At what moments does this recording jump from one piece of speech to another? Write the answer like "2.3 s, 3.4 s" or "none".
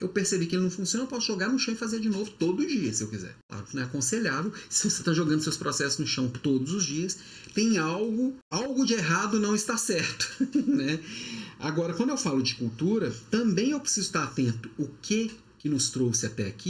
none